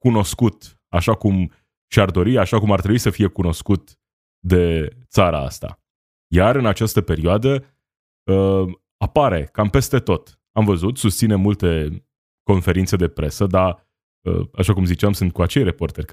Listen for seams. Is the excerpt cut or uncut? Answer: uncut